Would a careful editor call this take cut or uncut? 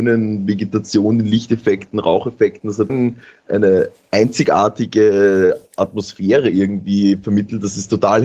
cut